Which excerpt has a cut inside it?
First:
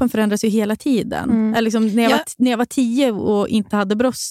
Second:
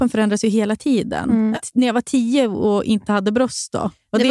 second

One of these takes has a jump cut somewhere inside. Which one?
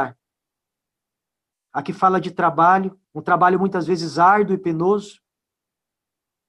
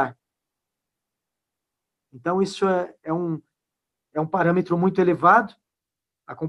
first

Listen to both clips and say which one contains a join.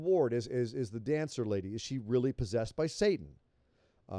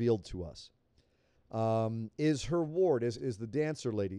second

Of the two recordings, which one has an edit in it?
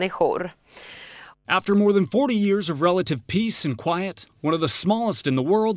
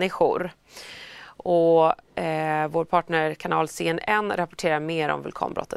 first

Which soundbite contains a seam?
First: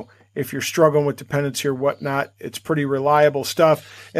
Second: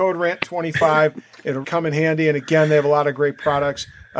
second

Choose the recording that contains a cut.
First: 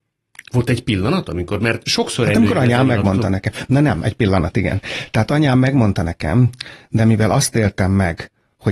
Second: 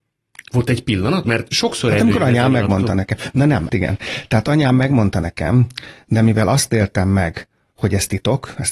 second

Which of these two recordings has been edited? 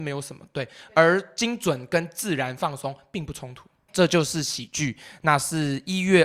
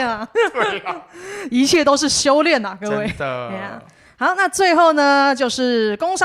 first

